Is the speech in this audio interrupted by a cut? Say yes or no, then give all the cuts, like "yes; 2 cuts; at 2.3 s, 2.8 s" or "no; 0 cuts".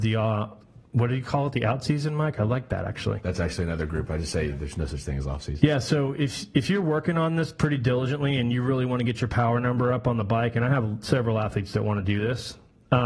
no; 0 cuts